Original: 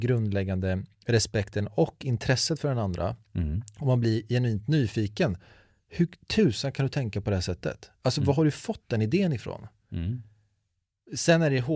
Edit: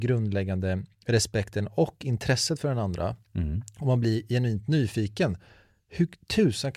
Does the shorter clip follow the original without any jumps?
yes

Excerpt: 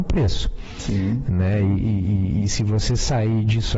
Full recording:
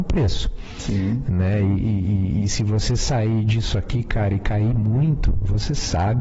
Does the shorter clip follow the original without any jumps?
yes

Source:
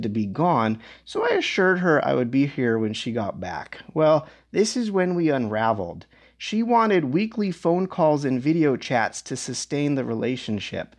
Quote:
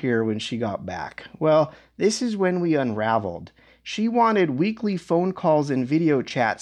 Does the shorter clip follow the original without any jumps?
yes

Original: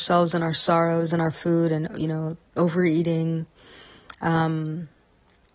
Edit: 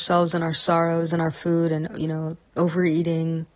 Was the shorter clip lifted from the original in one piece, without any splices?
yes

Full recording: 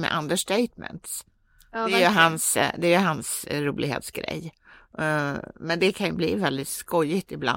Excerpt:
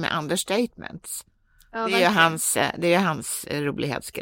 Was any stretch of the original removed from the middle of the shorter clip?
no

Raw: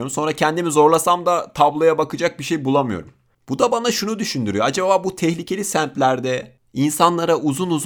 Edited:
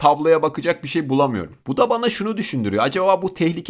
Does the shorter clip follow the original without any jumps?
no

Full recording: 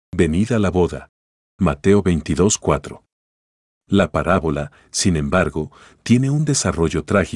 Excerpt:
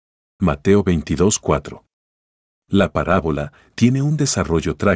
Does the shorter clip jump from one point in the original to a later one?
yes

